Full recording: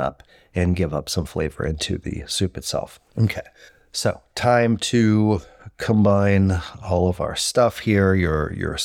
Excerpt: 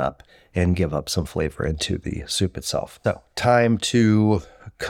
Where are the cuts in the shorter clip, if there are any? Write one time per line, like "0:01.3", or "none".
0:03.0